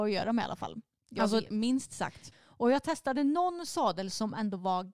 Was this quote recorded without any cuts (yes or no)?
no